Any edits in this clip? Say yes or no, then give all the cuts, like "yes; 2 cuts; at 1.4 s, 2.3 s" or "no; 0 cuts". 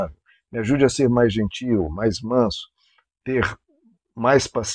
no; 0 cuts